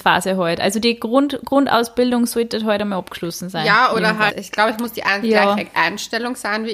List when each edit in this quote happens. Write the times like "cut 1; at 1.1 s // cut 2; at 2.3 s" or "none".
cut 1; at 4.3 s